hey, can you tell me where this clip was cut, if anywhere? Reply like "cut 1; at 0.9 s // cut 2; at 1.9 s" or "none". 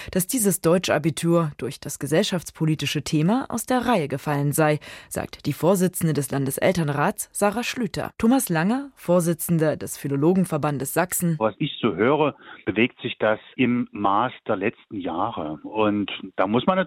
cut 1; at 8.2 s